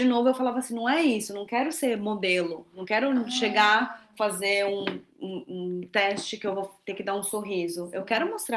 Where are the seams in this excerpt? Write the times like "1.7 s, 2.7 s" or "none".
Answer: none